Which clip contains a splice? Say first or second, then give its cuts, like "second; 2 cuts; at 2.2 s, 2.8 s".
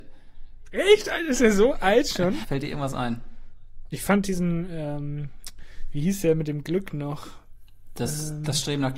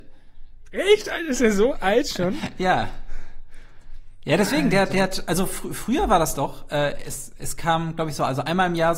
first; 2 cuts; at 2.4 s, 3.9 s